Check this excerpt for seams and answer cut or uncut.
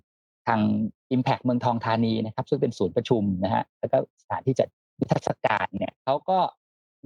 cut